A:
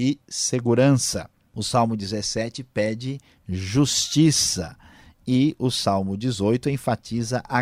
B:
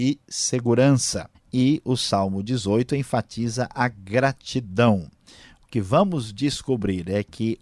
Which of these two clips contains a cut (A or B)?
B